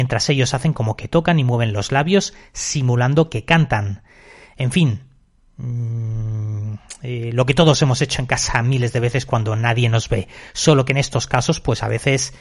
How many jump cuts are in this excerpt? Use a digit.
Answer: 0